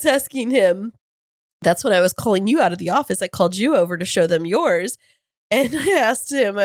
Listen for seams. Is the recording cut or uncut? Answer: uncut